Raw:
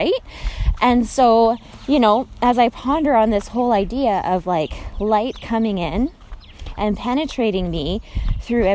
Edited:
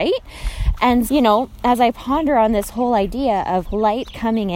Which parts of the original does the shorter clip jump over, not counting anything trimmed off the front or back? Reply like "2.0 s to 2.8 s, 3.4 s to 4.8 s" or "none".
1.1 s to 1.9 s, 4.4 s to 4.9 s